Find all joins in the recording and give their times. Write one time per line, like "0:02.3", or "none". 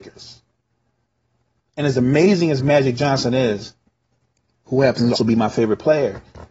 0:05.1